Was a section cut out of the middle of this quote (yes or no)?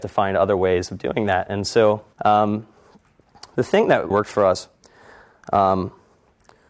yes